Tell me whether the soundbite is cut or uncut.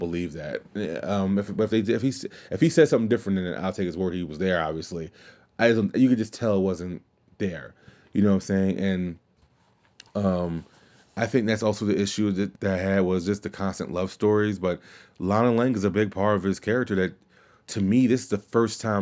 cut